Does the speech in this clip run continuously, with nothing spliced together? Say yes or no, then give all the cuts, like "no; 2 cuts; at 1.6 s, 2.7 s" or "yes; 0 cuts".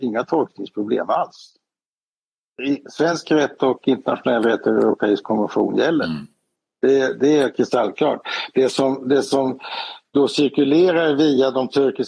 yes; 0 cuts